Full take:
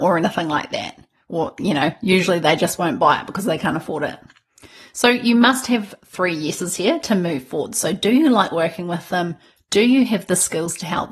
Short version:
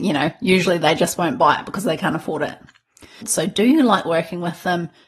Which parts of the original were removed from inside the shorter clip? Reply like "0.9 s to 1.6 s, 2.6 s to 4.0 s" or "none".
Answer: 4.8 s to 7.7 s